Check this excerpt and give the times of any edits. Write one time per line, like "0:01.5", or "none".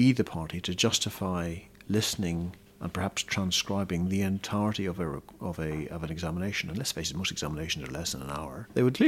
none